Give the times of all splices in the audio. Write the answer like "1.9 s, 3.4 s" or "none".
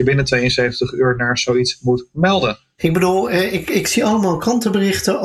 2.8 s